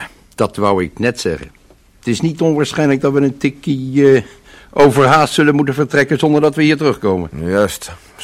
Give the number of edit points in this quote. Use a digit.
0